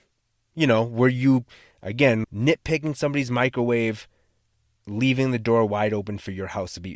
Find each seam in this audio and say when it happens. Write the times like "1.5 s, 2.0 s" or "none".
2.2 s